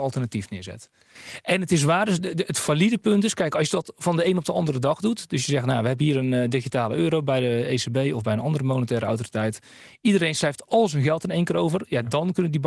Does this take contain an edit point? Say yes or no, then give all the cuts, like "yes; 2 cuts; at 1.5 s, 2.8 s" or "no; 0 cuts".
no; 0 cuts